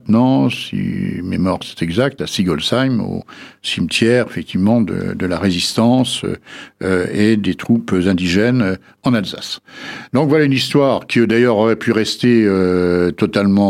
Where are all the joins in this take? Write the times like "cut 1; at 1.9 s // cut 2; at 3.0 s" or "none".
none